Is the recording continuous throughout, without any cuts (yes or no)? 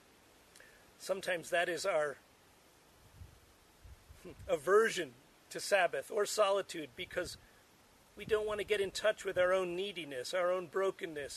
yes